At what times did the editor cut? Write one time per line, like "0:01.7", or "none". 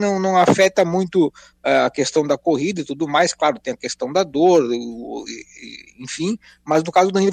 none

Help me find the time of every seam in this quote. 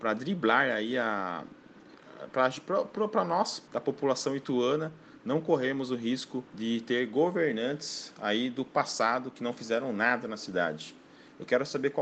0:03.7
0:06.5

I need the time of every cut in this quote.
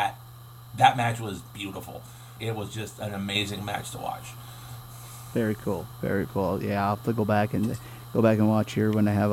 0:02.4
0:06.3

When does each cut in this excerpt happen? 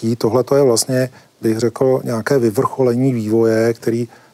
none

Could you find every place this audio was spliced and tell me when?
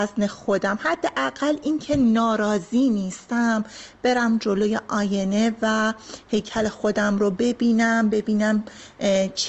none

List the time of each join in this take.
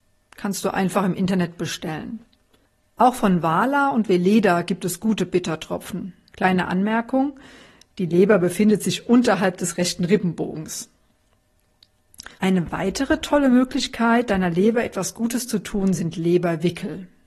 0:06.3
0:12.4

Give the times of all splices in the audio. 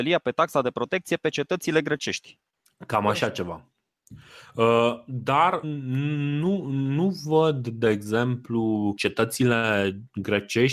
0:05.6
0:09.0

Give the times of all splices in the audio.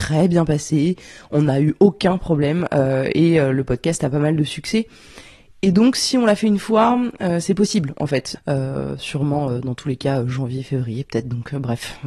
0:08.3

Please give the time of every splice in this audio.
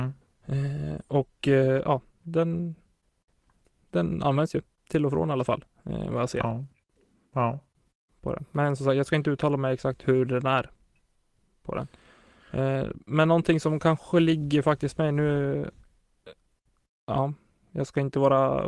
0:10.0

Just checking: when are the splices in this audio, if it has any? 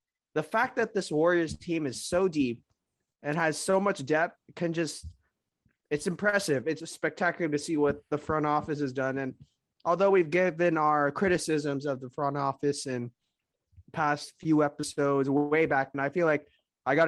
0:06.8
0:15.9

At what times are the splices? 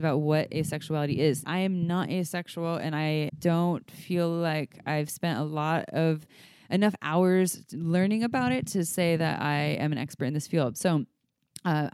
0:01.4
0:03.3

